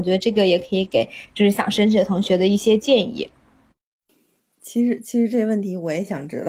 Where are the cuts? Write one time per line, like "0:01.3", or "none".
none